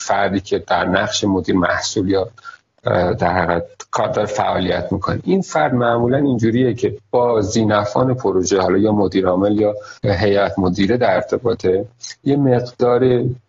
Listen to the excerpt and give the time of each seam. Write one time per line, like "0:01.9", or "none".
0:10.0

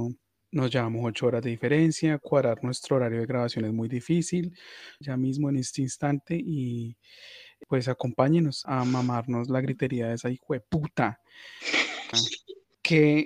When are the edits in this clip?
0:05.0
0:08.6
0:12.1

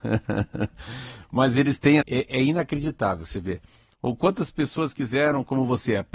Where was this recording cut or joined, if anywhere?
0:02.0
0:03.9

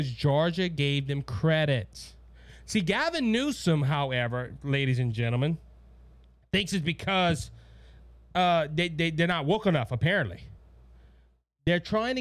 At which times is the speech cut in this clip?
none

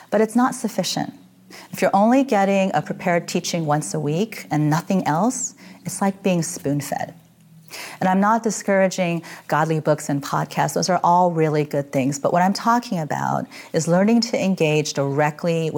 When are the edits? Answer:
none

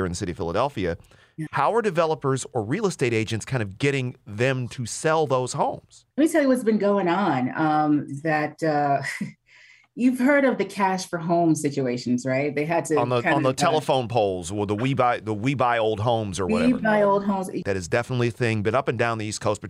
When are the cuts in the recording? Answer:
0:01.5
0:06.1
0:17.6

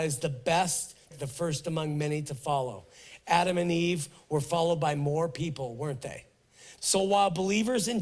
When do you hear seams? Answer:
0:01.1
0:06.8

